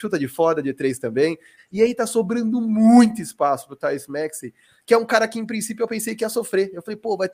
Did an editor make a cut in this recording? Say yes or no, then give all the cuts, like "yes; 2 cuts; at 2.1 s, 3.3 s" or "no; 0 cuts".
yes; 1 cut; at 1.6 s